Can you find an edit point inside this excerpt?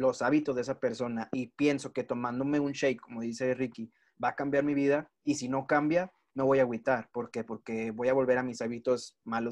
no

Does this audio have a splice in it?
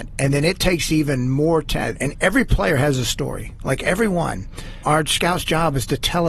yes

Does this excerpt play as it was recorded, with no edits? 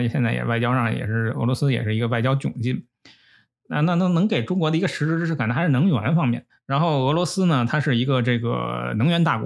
no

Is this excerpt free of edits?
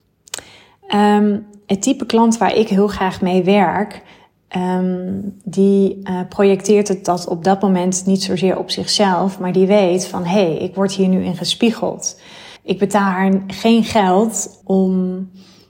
no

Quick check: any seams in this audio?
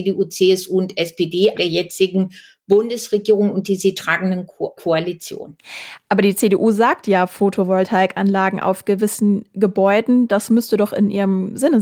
yes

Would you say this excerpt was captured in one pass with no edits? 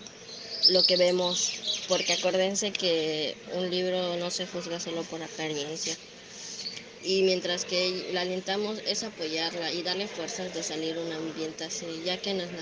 no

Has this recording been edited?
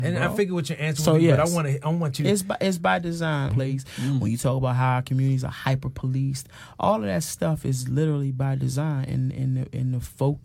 yes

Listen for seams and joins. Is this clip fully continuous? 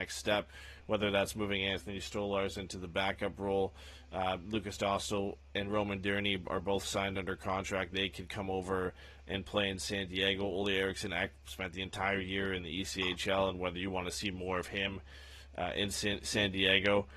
yes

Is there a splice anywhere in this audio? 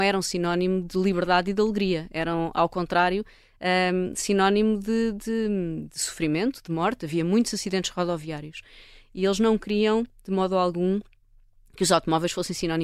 no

